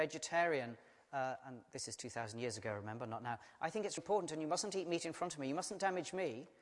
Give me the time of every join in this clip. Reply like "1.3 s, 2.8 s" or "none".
4.0 s